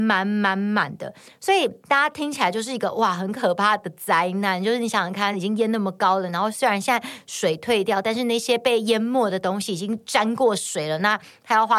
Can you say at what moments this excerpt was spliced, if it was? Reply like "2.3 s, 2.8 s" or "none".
none